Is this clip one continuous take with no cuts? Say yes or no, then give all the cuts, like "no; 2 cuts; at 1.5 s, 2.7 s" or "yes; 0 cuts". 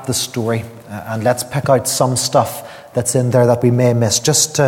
yes; 0 cuts